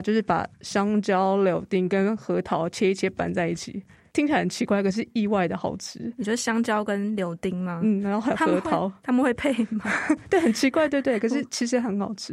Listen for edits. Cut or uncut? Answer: uncut